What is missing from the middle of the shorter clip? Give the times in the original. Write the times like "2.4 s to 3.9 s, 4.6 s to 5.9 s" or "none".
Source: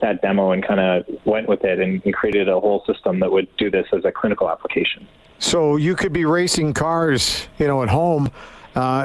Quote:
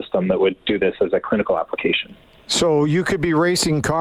none